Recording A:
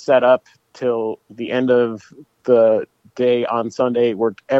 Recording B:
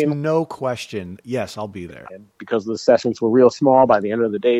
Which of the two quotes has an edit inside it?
B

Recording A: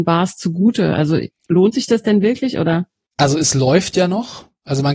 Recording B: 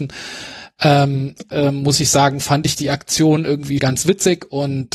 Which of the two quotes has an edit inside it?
B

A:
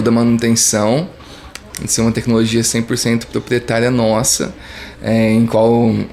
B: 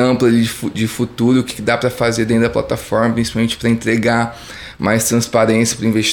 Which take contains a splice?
A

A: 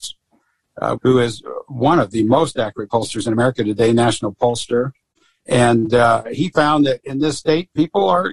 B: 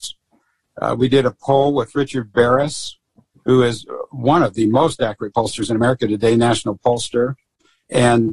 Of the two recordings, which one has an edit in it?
A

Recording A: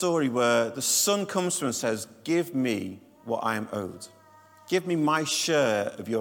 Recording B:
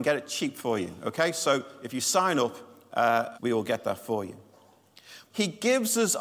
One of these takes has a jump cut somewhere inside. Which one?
B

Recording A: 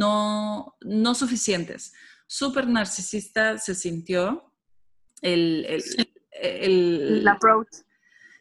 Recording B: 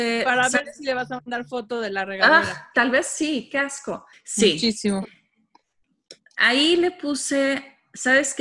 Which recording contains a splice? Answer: B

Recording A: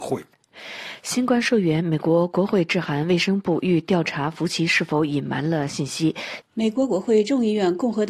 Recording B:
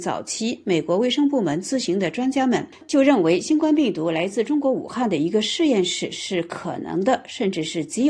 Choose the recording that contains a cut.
A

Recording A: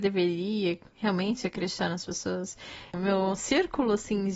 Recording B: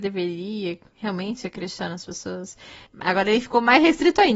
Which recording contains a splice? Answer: B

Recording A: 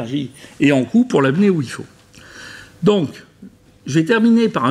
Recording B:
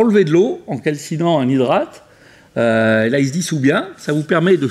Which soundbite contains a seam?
B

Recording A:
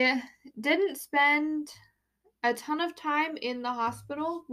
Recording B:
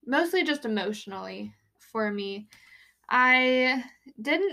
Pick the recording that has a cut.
B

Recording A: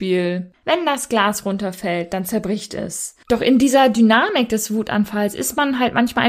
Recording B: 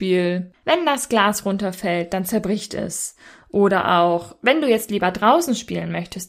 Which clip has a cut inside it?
A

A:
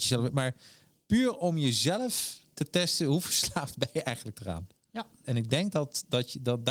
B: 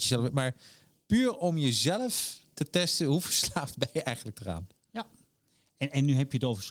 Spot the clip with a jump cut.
A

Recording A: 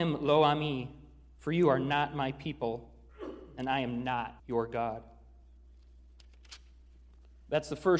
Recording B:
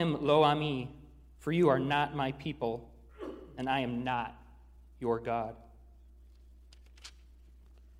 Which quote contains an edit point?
A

